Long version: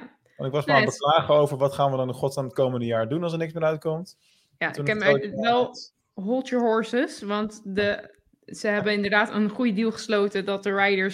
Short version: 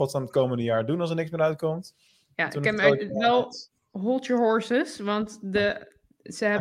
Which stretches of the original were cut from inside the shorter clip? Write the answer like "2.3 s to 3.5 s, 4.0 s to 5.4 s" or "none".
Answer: none